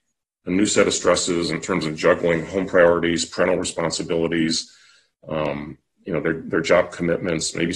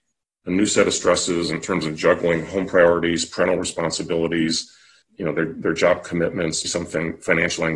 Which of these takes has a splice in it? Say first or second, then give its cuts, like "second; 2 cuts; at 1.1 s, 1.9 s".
second; 2 cuts; at 5.0 s, 6.6 s